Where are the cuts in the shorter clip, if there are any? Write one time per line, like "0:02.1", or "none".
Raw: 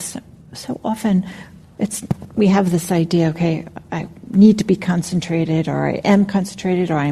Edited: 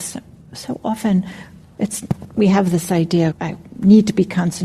0:03.3